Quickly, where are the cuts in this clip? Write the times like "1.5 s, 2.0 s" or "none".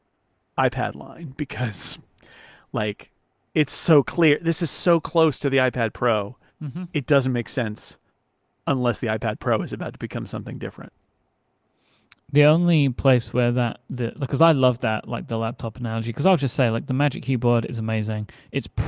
none